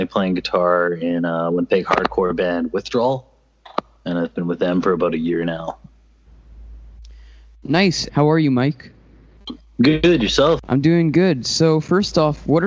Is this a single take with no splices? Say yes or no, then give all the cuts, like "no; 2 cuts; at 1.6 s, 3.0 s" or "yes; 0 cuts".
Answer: no; 2 cuts; at 8.1 s, 10.6 s